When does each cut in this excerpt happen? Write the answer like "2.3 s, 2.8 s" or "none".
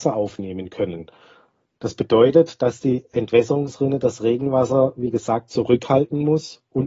1.8 s